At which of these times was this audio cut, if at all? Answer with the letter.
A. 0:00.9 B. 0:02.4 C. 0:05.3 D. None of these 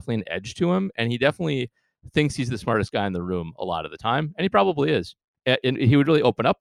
C